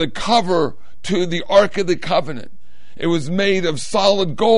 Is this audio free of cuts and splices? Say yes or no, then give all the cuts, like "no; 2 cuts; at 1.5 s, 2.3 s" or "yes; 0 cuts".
yes; 0 cuts